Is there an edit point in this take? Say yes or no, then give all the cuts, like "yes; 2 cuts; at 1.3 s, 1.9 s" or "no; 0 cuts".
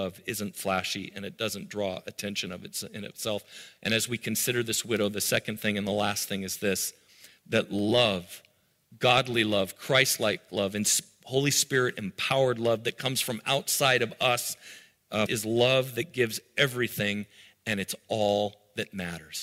yes; 1 cut; at 15.3 s